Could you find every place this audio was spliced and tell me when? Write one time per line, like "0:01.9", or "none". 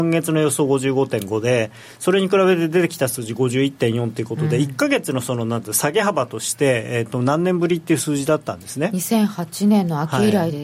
none